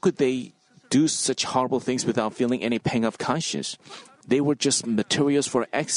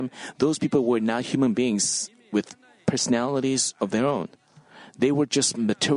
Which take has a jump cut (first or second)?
first